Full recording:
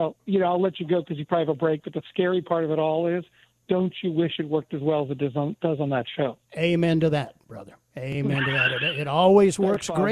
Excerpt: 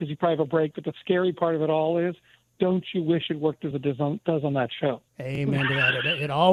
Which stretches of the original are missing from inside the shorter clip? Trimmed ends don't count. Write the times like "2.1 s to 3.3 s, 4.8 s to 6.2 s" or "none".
4.8 s to 5.1 s, 6.4 s to 7.9 s